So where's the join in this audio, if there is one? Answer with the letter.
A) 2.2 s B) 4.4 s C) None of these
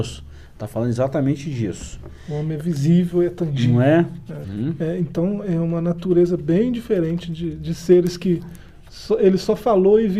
B